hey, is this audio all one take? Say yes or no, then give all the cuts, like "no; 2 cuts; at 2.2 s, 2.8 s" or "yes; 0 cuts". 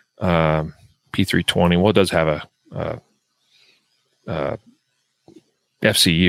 yes; 0 cuts